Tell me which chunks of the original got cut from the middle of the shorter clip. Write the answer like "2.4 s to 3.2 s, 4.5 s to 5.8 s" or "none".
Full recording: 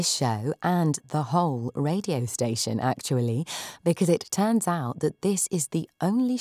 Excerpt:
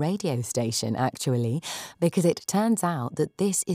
none